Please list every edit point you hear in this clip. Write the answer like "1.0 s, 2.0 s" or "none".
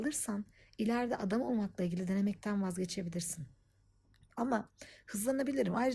none

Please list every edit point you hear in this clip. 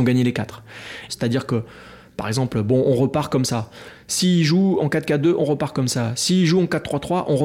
1.1 s

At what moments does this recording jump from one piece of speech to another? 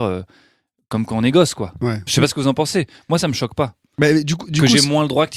2.1 s

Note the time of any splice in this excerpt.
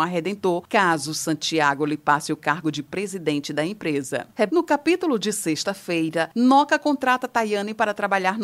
4.5 s

